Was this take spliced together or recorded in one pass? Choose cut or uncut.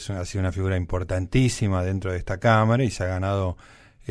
uncut